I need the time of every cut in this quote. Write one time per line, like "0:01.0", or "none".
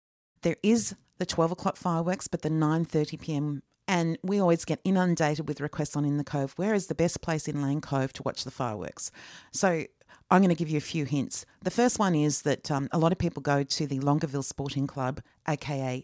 0:03.8